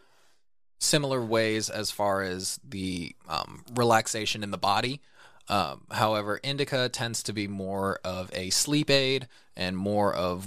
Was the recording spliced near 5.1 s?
no; 0 cuts

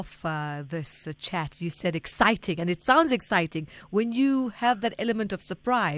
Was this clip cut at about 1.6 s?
no; 0 cuts

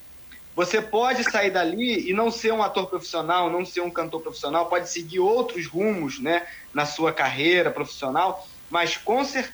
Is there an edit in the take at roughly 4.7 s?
no; 0 cuts

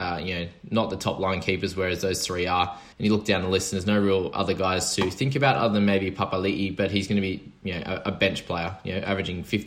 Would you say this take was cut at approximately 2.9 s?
yes; 1 cut; at 2.9 s

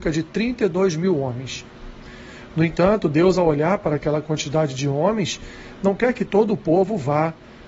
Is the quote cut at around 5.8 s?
yes; 1 cut; at 5.8 s

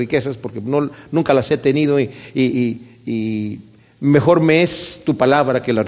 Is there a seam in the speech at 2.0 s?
no; 0 cuts

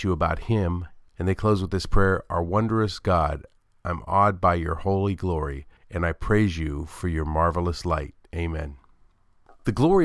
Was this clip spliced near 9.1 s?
no; 2 cuts; at 1.1 s, 5.8 s

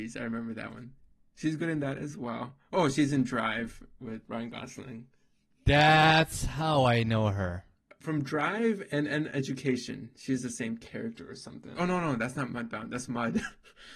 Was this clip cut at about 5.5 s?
no; 3 cuts; at 4.2 s, 7.9 s, 11.8 s

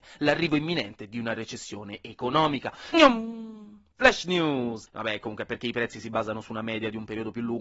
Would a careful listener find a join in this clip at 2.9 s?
yes; 2 cuts; at 2.9 s, 4.9 s

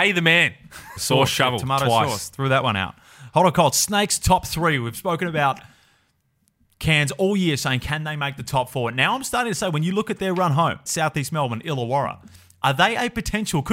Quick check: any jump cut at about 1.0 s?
yes; 2 cuts; at 1.0 s, 10.9 s

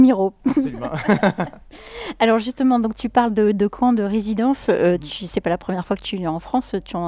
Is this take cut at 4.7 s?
no; 0 cuts

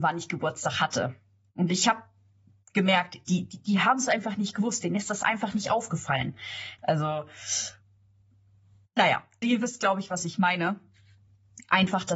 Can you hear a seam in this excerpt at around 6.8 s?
yes; 2 cuts; at 6.8 s, 9.4 s

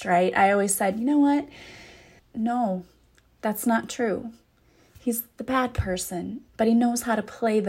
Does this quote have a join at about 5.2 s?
no; 2 cuts; at 2.2 s, 6.5 s

